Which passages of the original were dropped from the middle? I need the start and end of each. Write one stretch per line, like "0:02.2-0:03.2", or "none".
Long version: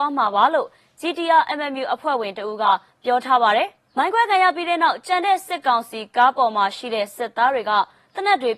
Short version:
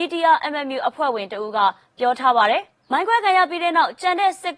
none